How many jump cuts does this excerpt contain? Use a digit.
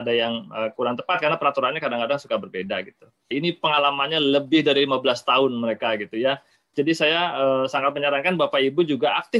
2